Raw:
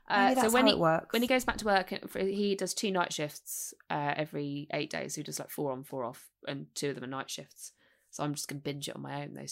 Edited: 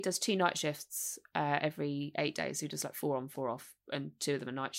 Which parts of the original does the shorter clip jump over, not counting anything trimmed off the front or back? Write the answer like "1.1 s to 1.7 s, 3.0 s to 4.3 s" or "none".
none